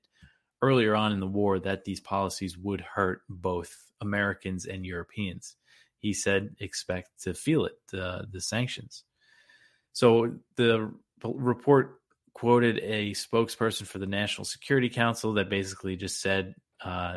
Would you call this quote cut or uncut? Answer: uncut